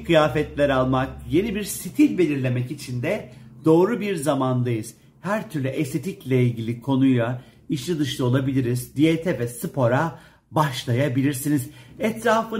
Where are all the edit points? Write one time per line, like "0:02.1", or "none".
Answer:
none